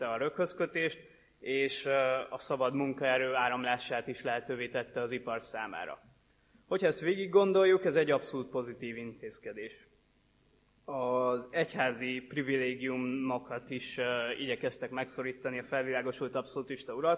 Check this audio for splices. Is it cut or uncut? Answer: uncut